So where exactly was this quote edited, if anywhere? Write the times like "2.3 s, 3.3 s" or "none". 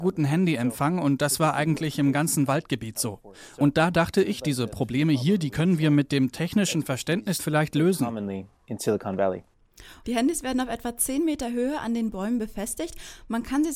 7.4 s, 10.0 s